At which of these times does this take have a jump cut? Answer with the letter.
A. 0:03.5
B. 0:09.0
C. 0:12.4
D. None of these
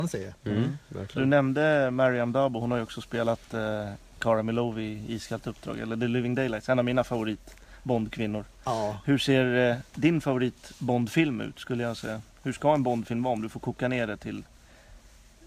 D